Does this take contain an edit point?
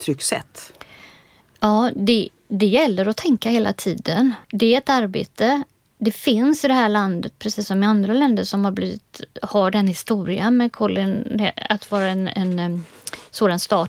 yes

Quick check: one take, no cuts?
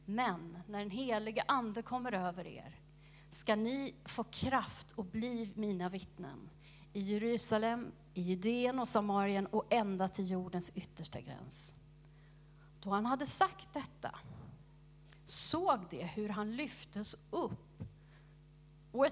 yes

